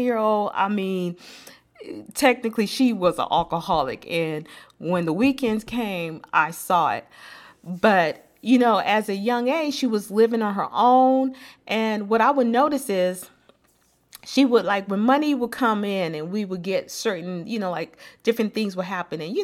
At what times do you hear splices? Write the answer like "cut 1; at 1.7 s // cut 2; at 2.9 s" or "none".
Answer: none